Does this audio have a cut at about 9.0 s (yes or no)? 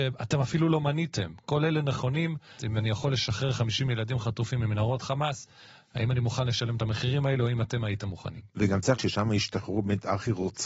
yes